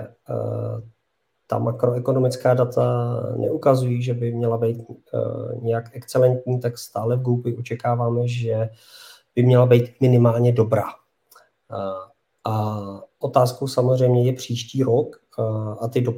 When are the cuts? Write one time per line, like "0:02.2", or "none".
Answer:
none